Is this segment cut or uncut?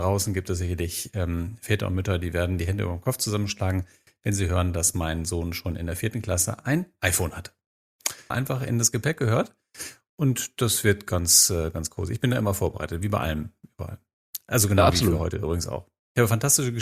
cut